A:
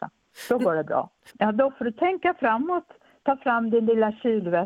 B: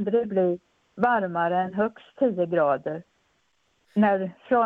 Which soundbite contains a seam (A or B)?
A